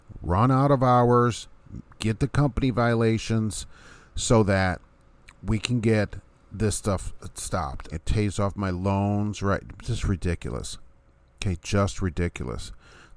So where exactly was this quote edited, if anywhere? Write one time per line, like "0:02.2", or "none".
0:07.9

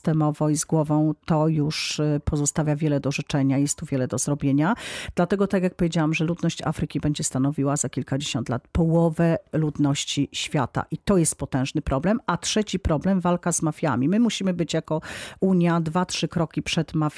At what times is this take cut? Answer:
none

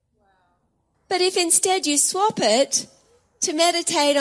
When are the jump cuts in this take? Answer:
0:00.9

